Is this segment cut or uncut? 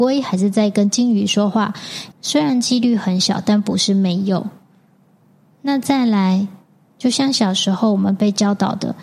cut